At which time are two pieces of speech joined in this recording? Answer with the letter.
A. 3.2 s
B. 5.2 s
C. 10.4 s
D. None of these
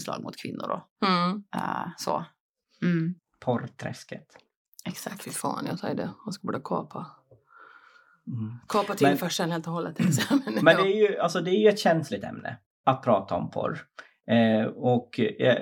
A